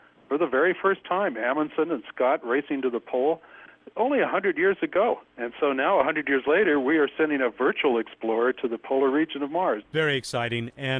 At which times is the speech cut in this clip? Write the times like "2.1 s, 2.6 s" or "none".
5.3 s, 9.8 s